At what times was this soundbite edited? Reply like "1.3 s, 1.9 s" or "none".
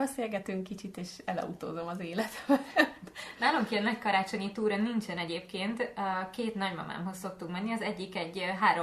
none